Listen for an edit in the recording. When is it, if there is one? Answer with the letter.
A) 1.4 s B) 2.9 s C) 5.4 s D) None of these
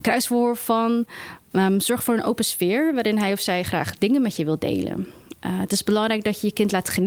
D